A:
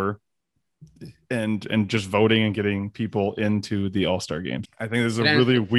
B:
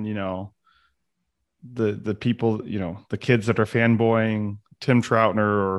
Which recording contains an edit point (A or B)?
A